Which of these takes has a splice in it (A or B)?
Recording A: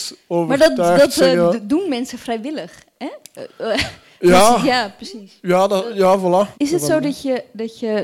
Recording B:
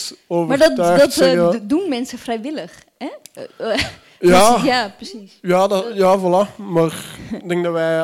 A